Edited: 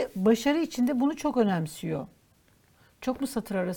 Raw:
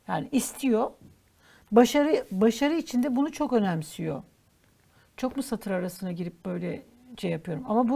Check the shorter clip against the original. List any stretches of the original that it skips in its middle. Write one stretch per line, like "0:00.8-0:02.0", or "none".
none